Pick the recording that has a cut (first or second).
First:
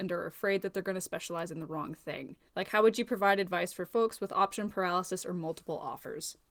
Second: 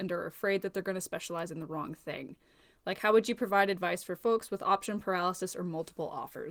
first